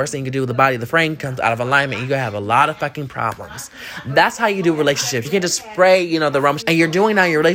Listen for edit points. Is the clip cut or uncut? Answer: cut